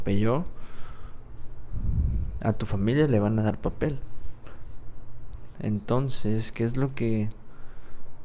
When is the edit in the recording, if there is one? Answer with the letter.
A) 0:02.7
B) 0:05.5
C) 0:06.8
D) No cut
B